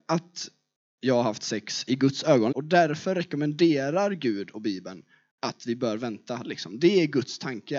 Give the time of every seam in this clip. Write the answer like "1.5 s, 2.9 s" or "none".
2.5 s, 6.4 s